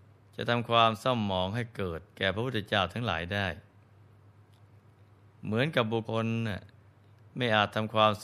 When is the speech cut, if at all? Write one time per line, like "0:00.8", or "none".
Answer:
0:02.1
0:06.0